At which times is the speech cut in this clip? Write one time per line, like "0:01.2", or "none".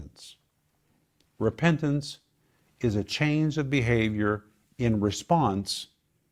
none

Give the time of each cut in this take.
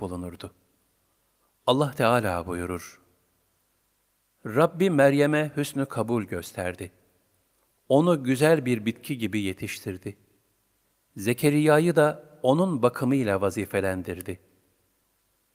none

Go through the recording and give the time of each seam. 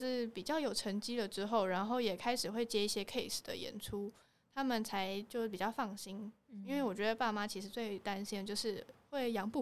none

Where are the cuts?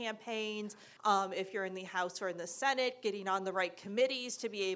0:01.0

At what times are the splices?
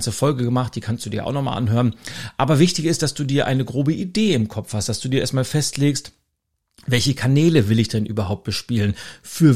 none

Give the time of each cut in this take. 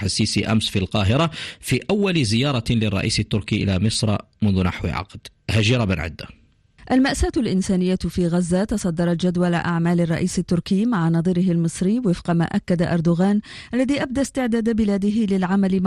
none

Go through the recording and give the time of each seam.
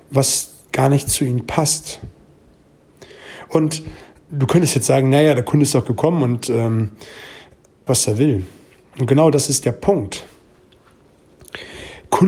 0:07.9

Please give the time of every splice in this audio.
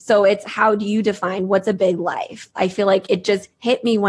0:02.6

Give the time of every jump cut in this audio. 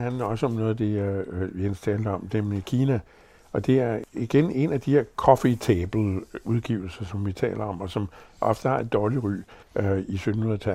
0:09.6

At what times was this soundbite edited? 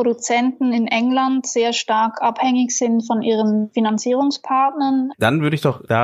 0:05.1

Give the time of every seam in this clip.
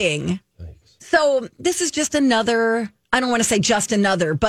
0:01.0

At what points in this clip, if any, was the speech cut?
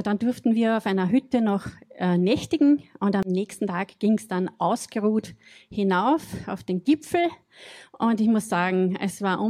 none

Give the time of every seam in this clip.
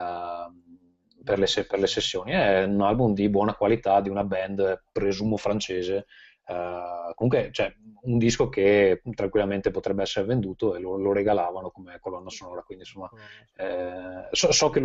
none

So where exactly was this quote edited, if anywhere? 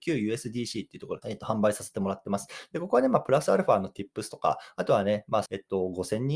0:01.2
0:05.5

